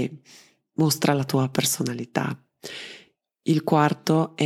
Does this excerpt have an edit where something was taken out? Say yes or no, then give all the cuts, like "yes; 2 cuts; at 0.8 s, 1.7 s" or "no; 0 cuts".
no; 0 cuts